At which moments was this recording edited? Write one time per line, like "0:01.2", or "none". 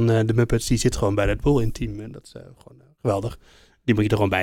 none